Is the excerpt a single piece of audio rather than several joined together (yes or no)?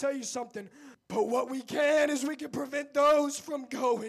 no